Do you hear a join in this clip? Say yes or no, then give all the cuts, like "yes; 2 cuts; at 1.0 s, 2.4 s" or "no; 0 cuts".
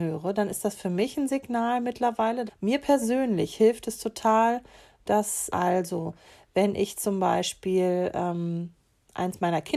yes; 2 cuts; at 2.5 s, 5.5 s